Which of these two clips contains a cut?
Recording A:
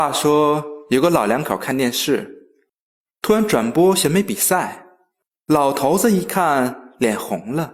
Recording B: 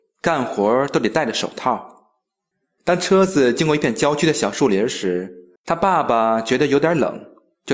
B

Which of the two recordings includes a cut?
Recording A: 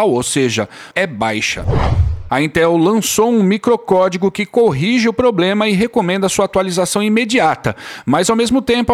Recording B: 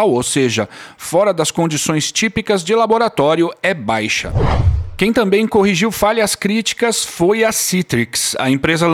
A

